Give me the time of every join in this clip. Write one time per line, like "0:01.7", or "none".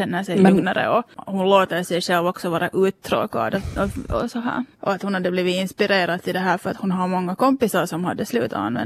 0:04.7